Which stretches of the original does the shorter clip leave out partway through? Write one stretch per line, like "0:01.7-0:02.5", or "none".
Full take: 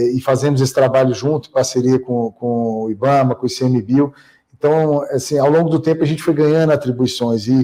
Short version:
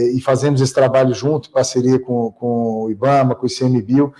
none

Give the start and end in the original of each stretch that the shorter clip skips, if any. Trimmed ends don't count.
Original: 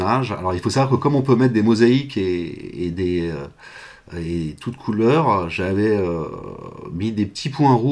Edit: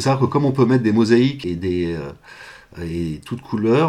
0:02.1-0:02.8

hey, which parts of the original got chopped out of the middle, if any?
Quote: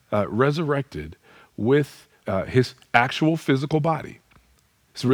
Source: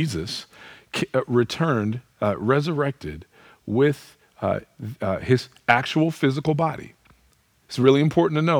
0:04.3-0:05.0

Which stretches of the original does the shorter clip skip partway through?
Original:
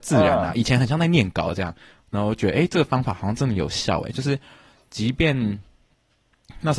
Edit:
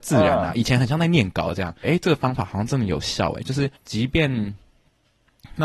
0:01.8-0:02.5
0:04.4-0:04.8

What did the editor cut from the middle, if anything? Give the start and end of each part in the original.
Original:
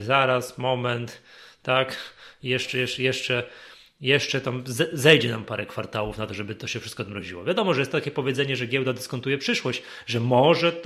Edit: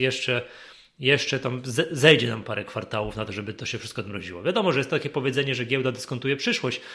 none

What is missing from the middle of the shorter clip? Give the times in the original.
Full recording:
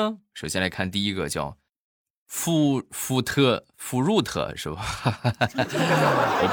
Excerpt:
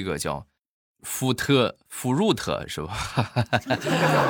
0:02.1-0:02.9

